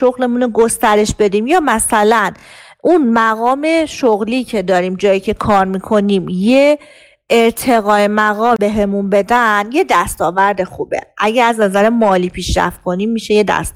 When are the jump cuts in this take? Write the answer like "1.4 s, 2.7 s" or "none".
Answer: none